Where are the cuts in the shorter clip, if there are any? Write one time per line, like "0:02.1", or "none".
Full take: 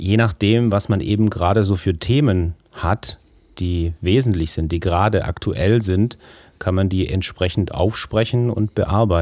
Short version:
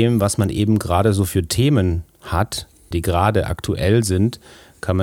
0:02.9